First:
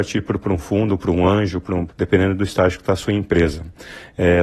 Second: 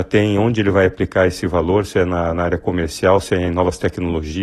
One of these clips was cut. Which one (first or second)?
first